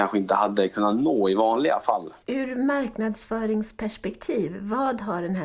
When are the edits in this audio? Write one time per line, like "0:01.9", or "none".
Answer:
0:02.2